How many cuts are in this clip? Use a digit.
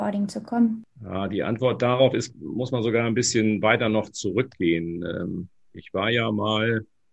1